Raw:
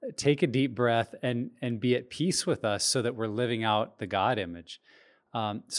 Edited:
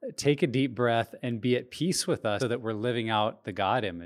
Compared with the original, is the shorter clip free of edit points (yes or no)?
no